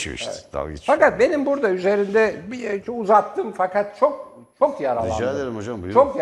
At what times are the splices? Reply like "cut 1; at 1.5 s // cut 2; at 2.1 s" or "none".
none

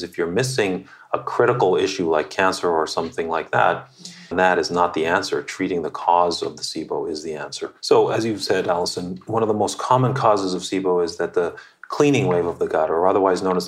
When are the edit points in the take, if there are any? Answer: cut 1; at 4.3 s

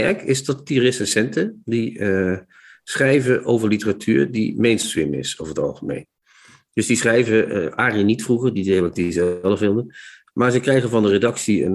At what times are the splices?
none

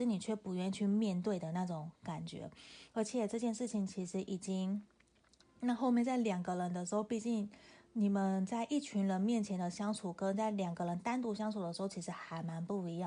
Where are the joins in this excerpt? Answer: cut 1; at 5.4 s

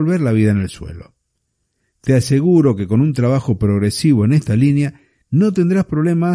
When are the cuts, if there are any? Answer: none

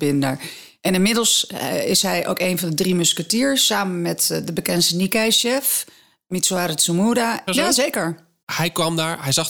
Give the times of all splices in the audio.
cut 1; at 7.5 s

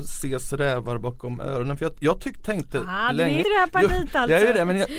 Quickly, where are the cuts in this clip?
cut 1; at 3.4 s

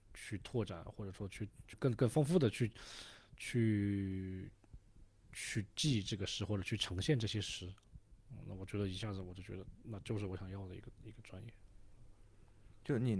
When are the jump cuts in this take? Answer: cut 1; at 1.7 s

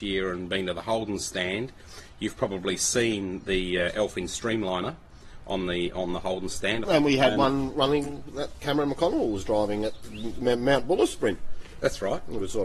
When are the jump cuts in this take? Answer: cut 1; at 6.8 s

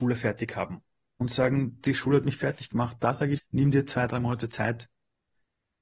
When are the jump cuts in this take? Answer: cut 1; at 3.4 s

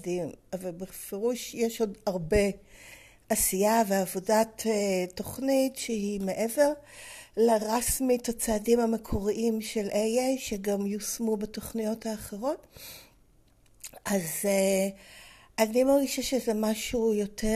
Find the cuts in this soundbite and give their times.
none

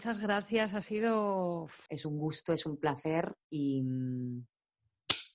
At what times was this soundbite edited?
cut 1; at 1.9 s // cut 2; at 3.4 s

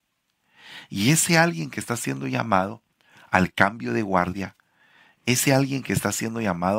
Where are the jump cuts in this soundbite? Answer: none

